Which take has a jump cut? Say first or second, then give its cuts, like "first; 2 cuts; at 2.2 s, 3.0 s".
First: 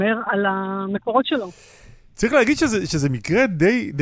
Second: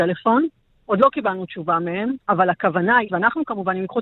second; 1 cut; at 3.1 s